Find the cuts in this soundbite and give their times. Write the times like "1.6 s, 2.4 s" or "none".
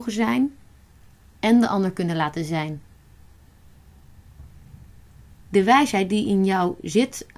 none